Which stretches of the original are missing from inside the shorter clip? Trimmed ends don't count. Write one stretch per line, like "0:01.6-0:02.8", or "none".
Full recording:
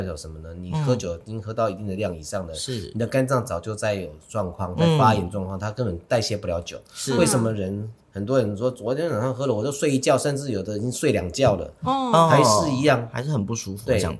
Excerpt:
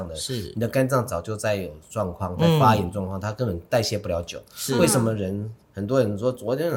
none